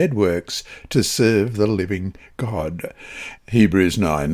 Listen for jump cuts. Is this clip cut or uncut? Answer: cut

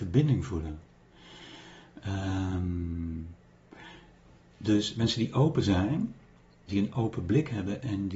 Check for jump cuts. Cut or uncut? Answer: cut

